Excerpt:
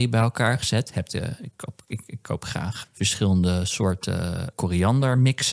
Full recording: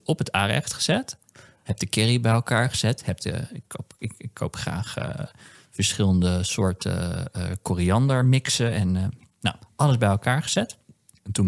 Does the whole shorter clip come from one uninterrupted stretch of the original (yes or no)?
no